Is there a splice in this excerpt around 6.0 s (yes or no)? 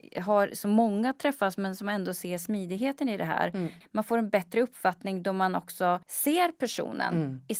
yes